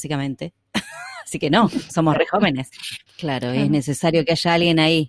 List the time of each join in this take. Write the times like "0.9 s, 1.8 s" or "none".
3.1 s